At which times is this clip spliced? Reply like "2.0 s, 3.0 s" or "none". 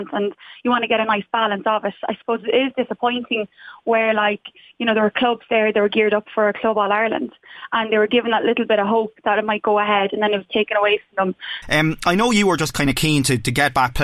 11.6 s